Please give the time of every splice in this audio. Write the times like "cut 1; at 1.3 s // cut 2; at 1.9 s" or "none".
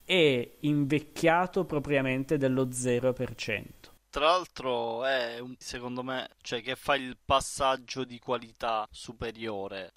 cut 1; at 5.6 s